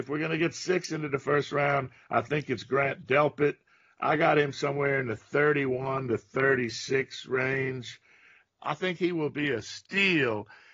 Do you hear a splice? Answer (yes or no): yes